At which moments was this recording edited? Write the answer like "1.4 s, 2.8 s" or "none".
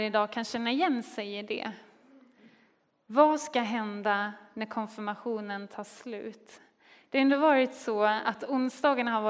none